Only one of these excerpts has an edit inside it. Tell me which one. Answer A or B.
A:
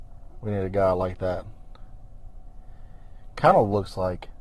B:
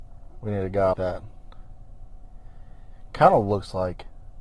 B